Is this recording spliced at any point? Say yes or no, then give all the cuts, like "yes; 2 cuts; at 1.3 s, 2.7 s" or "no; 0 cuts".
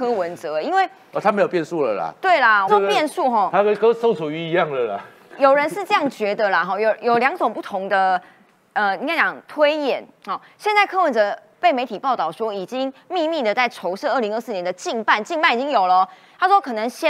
yes; 1 cut; at 2.7 s